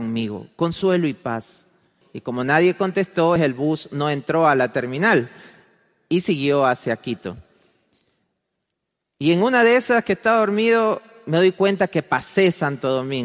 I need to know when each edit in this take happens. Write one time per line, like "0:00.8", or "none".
0:02.0
0:03.4